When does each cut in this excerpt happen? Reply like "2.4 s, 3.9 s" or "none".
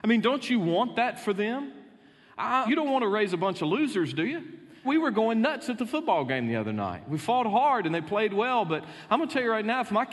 2.7 s, 4.8 s